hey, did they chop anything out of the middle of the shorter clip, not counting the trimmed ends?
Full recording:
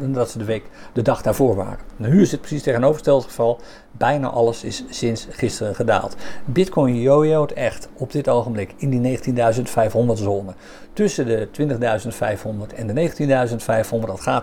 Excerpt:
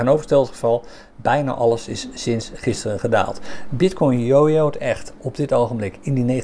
no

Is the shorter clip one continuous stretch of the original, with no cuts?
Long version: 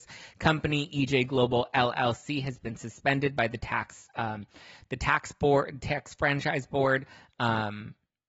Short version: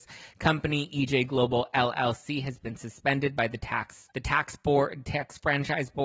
no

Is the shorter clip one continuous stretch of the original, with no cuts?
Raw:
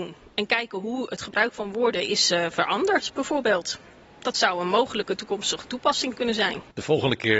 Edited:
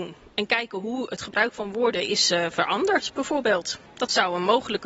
no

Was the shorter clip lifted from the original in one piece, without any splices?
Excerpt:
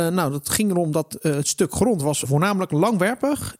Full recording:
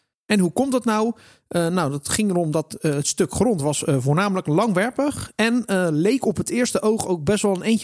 no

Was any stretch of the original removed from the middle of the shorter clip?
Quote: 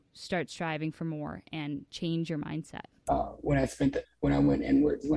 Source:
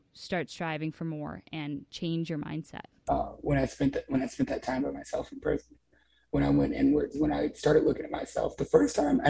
yes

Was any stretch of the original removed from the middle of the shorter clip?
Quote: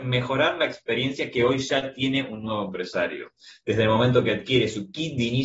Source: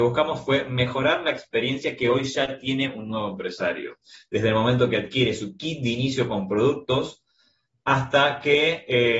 no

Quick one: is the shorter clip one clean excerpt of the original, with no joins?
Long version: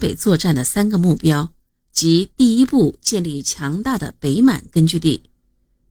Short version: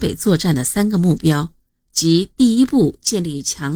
yes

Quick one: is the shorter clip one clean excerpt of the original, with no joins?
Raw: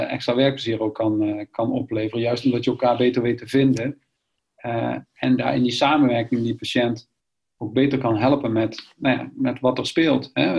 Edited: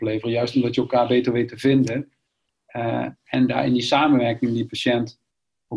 yes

